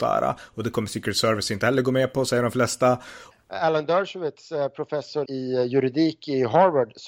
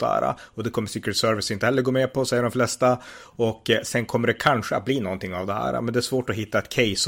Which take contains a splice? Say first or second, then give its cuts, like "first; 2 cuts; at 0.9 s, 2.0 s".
first; 2 cuts; at 3.3 s, 5.3 s